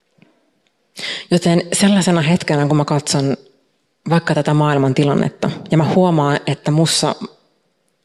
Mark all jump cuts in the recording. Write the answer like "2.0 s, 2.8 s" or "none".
none

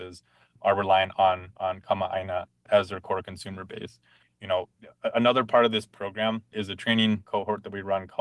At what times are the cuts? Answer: 4.2 s

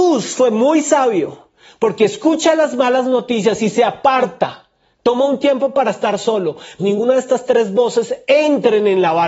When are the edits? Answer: 6.8 s

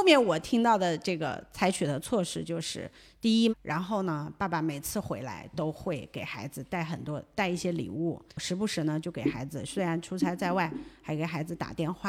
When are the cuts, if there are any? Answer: 3.5 s, 8.3 s

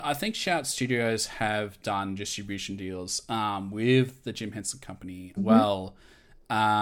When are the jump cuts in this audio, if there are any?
5.4 s

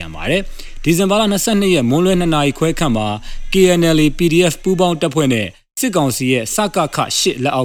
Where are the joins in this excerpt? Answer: none

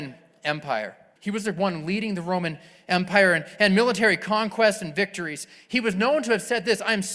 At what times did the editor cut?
1.2 s

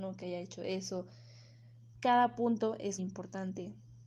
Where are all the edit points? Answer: 1.9 s, 3.0 s

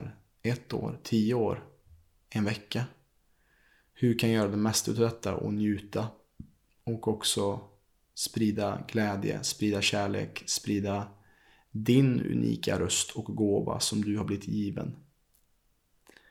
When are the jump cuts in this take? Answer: none

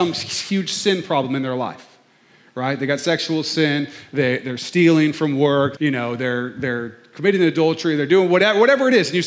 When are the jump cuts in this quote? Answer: 5.8 s

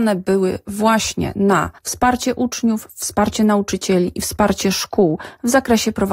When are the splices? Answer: 1.8 s

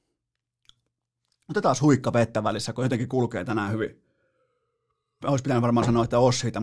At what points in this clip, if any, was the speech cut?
5.2 s

